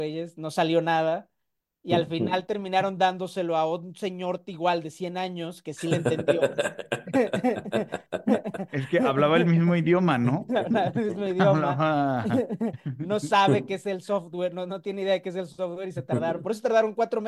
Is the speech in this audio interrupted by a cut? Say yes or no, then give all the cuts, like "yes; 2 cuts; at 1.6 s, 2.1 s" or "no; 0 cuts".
no; 0 cuts